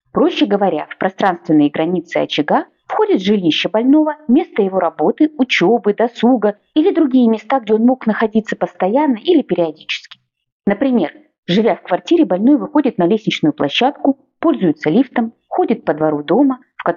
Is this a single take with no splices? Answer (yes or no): yes